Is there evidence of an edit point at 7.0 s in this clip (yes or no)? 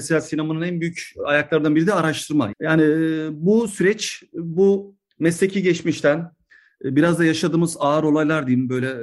no